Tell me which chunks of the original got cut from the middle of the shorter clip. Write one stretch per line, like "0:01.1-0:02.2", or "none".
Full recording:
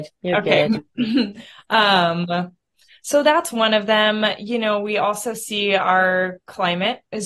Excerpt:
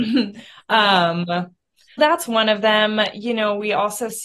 0:03.0-0:03.2